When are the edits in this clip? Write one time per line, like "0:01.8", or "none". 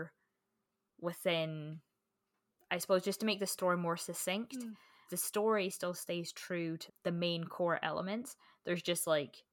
0:05.1
0:06.9